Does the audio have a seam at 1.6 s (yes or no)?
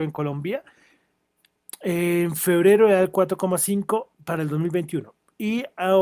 no